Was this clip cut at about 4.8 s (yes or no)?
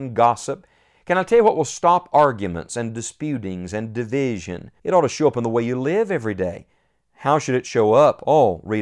yes